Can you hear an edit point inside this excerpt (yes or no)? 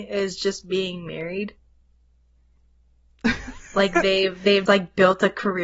yes